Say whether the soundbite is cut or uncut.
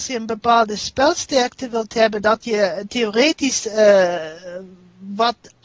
uncut